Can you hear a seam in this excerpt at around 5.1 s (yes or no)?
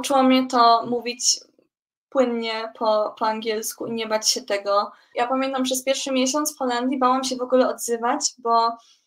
yes